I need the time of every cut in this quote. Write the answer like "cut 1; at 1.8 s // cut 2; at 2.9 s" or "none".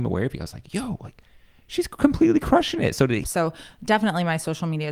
cut 1; at 3.2 s